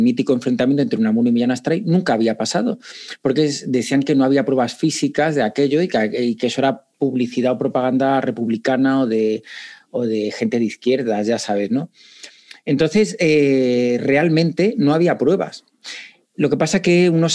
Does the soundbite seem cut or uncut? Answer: uncut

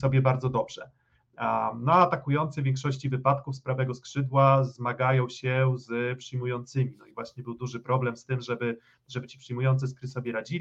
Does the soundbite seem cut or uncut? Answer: uncut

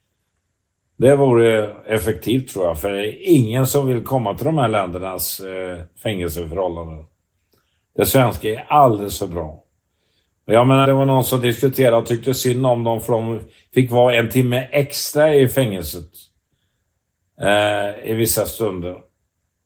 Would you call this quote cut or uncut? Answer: cut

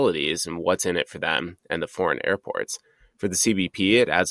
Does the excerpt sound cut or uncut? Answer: uncut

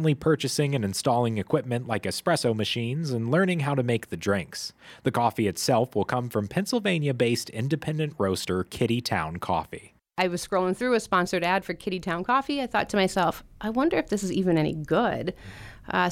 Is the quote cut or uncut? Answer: uncut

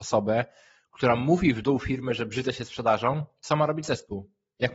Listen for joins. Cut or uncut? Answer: uncut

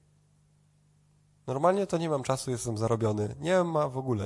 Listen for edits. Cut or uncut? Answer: uncut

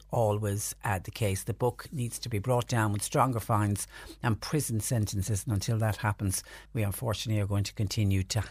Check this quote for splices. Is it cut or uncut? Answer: uncut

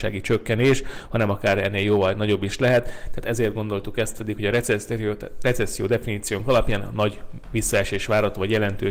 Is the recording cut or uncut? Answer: uncut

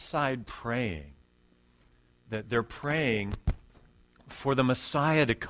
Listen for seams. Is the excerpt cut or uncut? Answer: cut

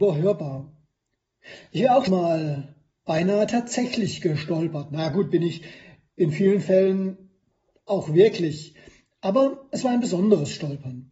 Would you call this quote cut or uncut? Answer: cut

